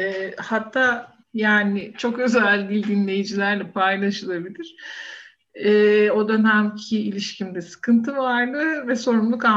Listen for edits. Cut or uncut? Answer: cut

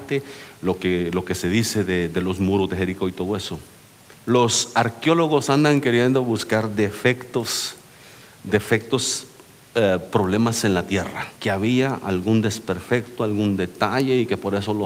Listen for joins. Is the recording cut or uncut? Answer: cut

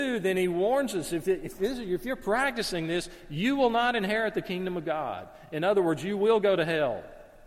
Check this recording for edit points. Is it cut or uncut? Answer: uncut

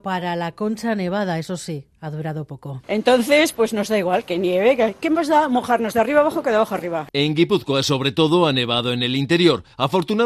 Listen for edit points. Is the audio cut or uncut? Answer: cut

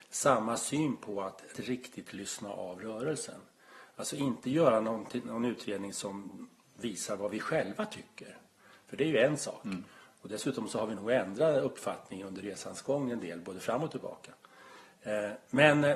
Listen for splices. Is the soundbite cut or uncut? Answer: cut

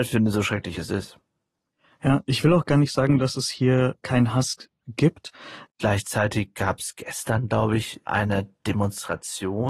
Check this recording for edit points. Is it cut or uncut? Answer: cut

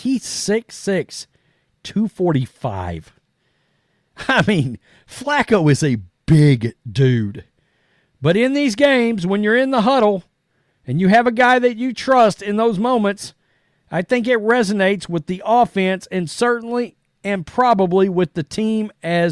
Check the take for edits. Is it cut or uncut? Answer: uncut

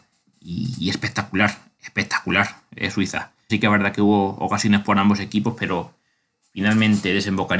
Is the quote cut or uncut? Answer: cut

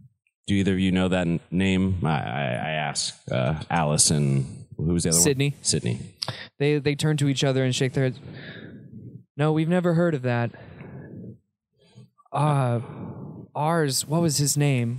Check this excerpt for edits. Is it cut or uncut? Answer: uncut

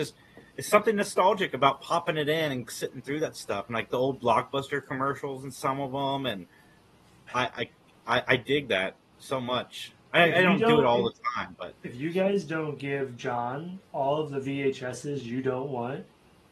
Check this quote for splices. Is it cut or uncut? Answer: uncut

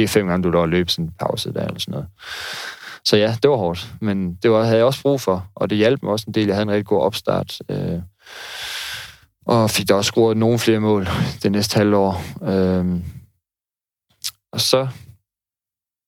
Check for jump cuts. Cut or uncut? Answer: uncut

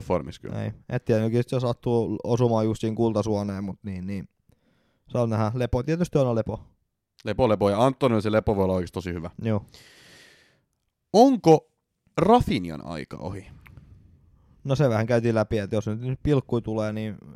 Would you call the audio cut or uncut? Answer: uncut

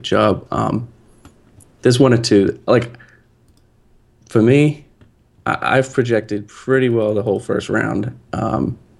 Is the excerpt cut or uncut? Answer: uncut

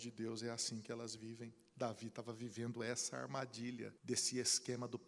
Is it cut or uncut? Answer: cut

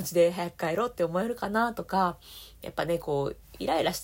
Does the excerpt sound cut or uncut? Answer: cut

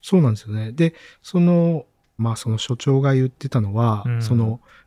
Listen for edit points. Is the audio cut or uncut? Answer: cut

